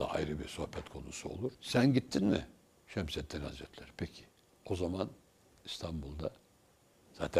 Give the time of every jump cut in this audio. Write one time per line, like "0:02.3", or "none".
none